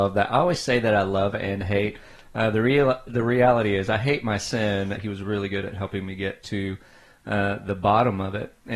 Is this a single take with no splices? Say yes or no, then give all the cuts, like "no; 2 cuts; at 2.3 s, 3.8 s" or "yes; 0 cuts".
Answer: no; 1 cut; at 4.9 s